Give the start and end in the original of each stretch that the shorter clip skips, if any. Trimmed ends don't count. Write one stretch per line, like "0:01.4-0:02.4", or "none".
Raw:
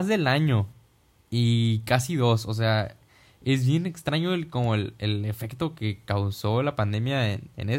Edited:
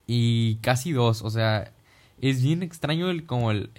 none